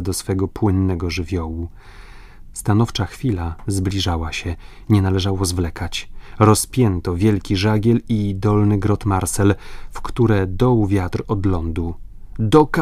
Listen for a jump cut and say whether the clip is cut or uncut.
uncut